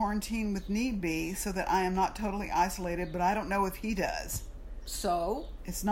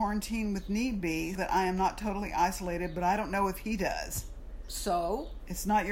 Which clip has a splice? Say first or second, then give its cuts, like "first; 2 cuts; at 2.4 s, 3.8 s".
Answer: second; 1 cut; at 1.4 s